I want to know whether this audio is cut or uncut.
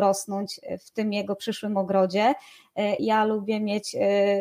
cut